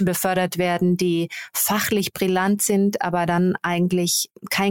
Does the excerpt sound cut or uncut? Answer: uncut